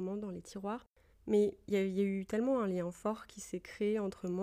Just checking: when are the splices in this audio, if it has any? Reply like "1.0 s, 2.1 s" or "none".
1.1 s